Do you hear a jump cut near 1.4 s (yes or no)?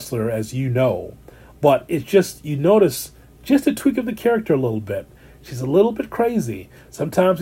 no